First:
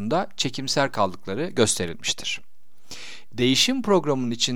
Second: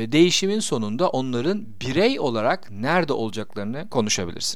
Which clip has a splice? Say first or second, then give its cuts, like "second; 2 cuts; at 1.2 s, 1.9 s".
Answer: first; 1 cut; at 3.3 s